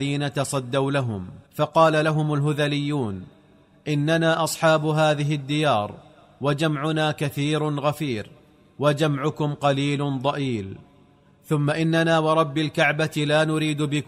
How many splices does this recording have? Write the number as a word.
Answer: one